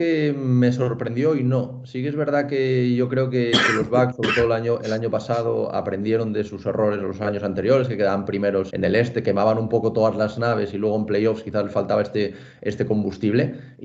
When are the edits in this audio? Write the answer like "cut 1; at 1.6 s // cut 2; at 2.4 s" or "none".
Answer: cut 1; at 8.7 s